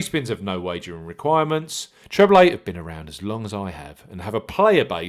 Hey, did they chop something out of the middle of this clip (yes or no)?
yes